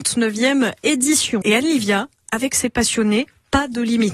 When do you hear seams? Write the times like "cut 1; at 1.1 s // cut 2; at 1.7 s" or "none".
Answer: cut 1; at 1.4 s